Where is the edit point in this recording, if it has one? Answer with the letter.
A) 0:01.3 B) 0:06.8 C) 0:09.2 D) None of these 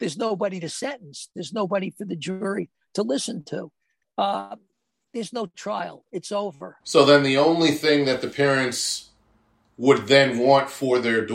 B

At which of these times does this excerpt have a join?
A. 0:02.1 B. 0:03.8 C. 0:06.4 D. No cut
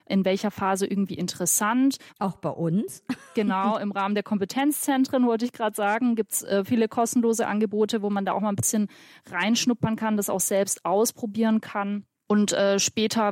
A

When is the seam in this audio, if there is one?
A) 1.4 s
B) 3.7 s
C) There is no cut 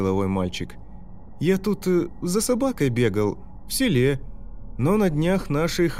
B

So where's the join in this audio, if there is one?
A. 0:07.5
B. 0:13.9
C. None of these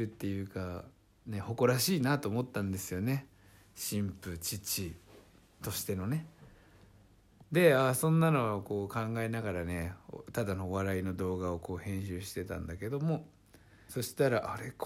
B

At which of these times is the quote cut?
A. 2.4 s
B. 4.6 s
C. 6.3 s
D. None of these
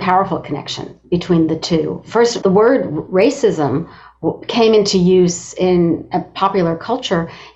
A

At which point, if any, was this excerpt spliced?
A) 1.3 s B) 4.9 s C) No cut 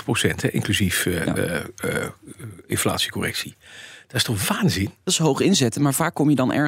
B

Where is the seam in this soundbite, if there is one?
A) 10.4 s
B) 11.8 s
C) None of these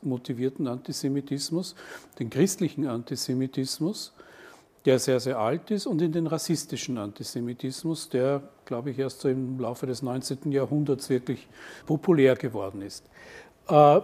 B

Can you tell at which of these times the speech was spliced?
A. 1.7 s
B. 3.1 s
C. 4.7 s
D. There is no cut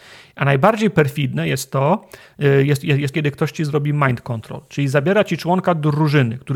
B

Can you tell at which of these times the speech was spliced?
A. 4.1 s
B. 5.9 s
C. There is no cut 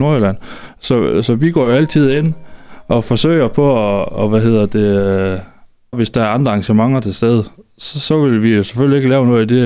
B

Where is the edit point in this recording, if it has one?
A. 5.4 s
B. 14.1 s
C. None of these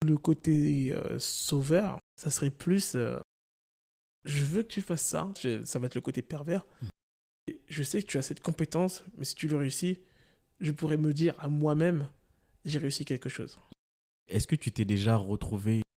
A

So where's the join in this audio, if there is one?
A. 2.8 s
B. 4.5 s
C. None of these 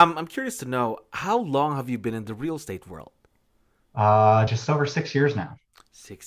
C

